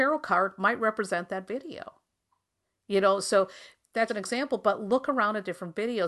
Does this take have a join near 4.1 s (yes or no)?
yes